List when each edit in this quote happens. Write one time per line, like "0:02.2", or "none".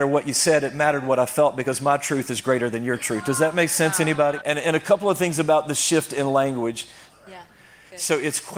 0:04.4
0:07.1